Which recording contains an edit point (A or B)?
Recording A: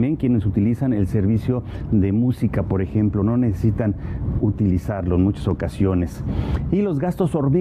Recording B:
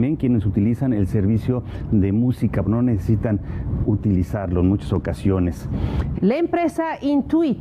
B